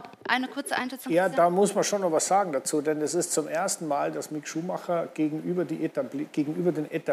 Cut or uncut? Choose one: uncut